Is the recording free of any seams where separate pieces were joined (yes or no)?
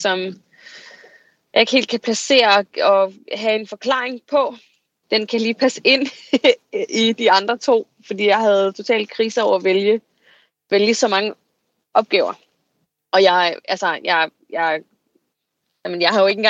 no